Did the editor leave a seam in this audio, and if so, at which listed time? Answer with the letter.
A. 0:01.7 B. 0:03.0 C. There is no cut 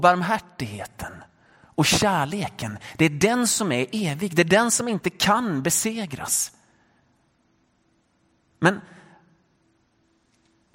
C